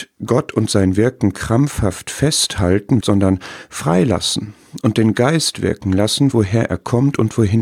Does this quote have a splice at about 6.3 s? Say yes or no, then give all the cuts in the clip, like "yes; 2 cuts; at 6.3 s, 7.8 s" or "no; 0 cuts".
yes; 2 cuts; at 3.0 s, 6.3 s